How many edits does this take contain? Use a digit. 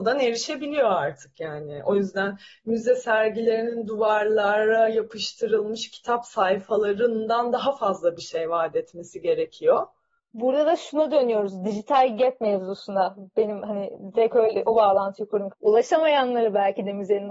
1